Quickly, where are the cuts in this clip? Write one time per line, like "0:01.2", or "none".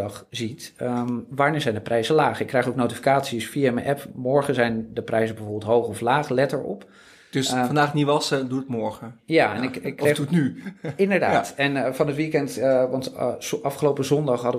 none